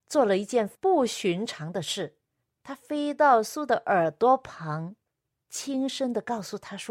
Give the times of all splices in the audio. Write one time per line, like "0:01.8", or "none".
none